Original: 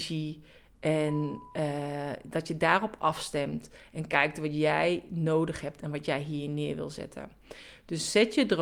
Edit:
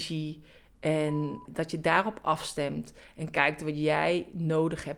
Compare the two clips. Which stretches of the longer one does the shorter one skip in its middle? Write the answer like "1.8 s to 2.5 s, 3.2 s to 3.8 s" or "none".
1.5 s to 2.2 s